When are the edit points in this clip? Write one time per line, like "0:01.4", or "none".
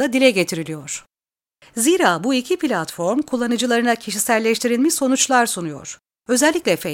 0:01.6